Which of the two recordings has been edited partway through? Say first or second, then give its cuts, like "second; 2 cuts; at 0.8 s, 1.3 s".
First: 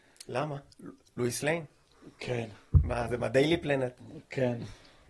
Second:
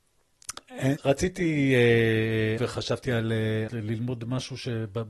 second; 3 cuts; at 1.0 s, 2.6 s, 3.7 s